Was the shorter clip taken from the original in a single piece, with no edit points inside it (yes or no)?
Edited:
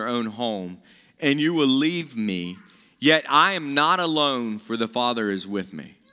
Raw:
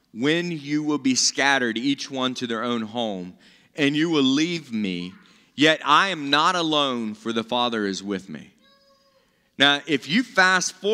yes